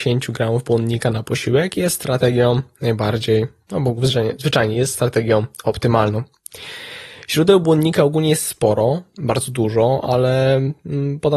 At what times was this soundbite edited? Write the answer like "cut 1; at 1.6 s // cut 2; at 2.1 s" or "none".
none